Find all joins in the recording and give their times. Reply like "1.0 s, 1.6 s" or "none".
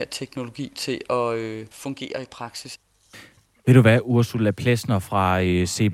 none